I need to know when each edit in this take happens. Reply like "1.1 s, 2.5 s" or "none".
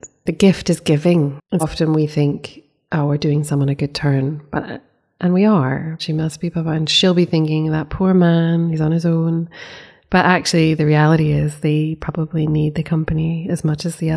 1.6 s, 6.0 s